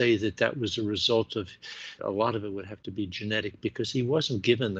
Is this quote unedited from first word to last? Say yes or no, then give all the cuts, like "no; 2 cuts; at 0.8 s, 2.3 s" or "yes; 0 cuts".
no; 1 cut; at 2.0 s